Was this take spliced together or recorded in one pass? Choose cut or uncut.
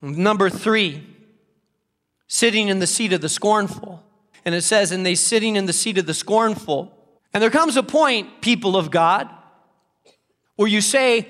cut